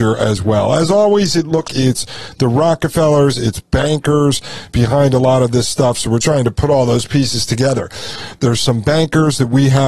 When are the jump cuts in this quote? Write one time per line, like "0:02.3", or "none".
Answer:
0:01.7
0:06.2
0:08.4